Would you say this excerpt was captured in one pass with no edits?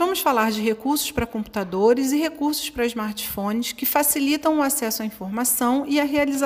yes; 0 cuts

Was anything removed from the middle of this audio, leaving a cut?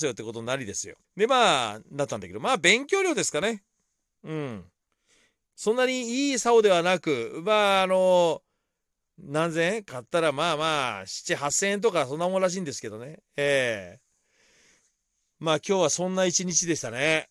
yes; 1 cut; at 1.0 s

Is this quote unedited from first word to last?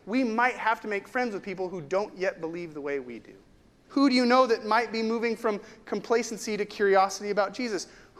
no; 1 cut; at 3.8 s

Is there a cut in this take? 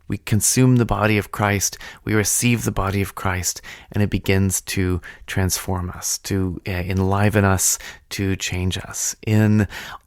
no; 0 cuts

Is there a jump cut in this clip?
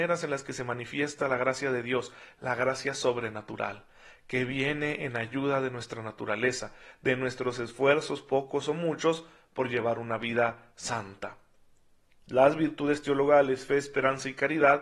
no; 0 cuts

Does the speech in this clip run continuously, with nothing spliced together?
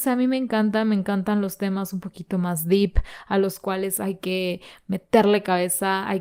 yes; 0 cuts

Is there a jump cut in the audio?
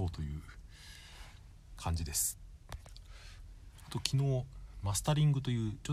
no; 0 cuts

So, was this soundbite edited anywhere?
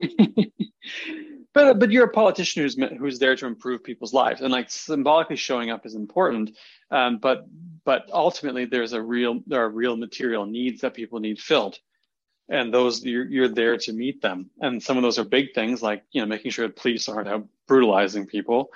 no; 0 cuts

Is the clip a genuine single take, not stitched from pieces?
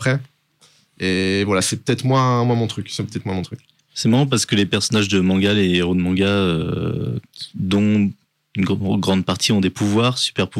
yes; 0 cuts

